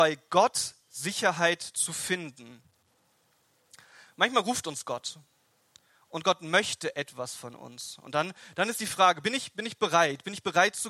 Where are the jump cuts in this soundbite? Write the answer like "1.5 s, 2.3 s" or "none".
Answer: none